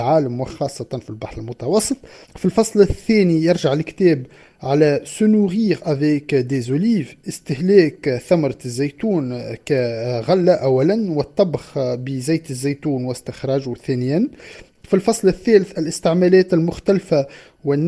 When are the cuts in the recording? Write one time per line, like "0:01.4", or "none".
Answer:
0:02.2